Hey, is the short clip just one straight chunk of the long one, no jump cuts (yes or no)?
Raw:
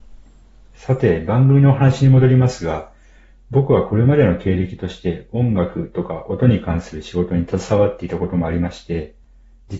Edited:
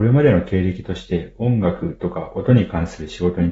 yes